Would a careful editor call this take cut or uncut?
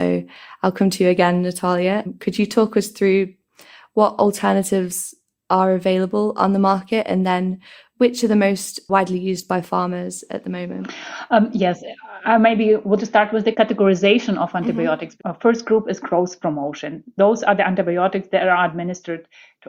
cut